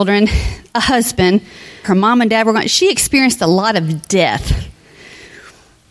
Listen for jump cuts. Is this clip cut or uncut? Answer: cut